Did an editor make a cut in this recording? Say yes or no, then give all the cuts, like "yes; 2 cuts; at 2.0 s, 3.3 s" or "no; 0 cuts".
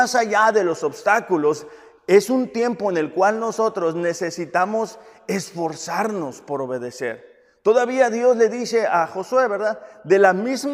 no; 0 cuts